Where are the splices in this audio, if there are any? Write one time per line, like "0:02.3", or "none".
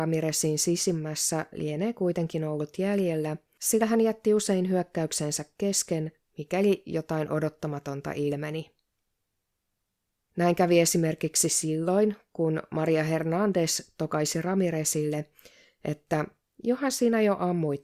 none